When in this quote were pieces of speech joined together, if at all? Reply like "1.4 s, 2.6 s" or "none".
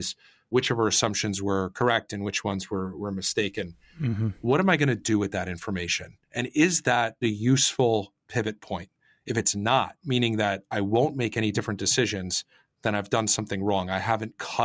none